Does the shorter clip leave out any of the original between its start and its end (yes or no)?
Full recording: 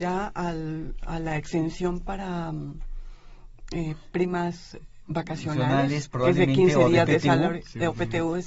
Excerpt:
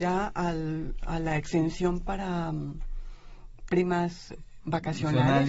yes